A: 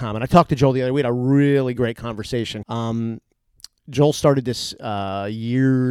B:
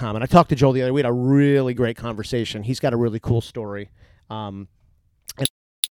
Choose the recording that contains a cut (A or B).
A